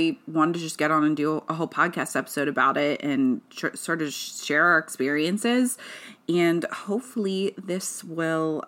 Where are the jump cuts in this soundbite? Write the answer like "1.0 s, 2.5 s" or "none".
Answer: none